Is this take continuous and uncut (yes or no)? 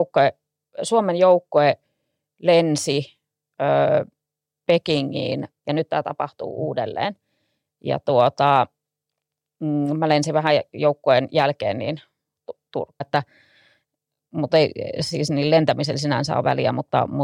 no